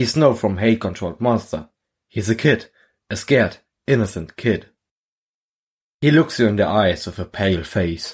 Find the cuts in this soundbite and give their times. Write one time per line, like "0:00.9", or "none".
none